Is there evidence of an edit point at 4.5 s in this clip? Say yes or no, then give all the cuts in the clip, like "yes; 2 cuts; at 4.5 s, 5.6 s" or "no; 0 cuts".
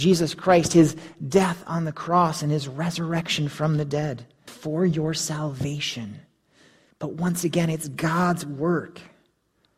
yes; 2 cuts; at 4.5 s, 6.9 s